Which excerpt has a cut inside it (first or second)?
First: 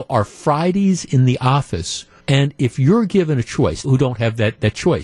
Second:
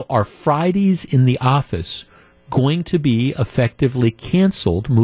first